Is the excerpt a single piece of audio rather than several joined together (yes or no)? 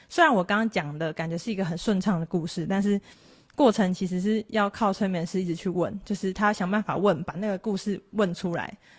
yes